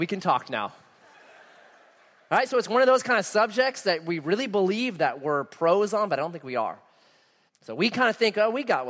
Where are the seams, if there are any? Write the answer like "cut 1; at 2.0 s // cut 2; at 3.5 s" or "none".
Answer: cut 1; at 7.5 s